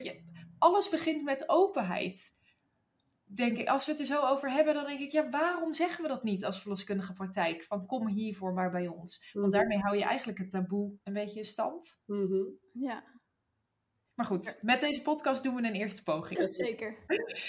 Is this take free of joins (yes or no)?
no